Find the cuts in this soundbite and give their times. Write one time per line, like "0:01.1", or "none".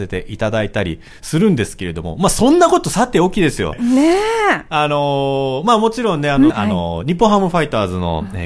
0:03.7
0:06.5